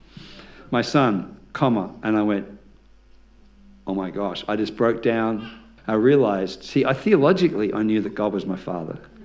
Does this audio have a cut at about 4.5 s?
no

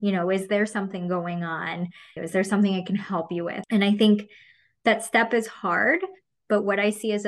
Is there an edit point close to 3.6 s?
yes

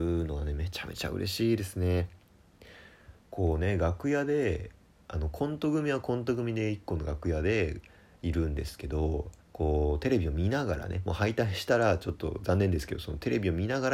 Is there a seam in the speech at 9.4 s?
yes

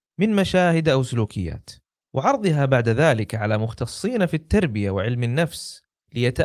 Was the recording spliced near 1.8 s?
no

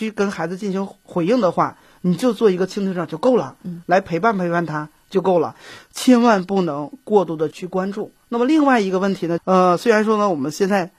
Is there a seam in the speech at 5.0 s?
no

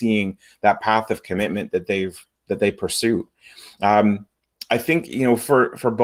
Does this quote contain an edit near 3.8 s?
no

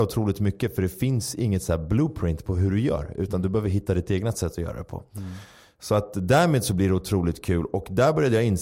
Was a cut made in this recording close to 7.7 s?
no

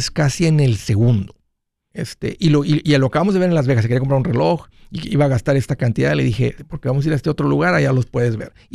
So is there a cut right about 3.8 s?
no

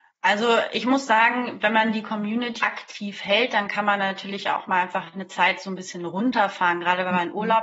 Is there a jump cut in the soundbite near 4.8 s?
no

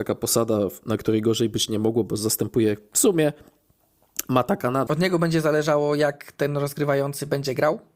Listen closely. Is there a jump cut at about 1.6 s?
no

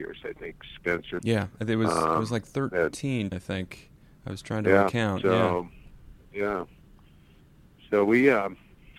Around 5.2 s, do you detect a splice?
no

